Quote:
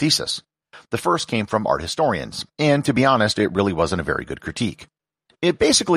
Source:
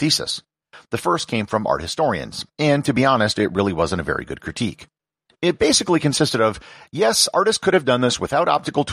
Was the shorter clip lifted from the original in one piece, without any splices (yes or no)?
yes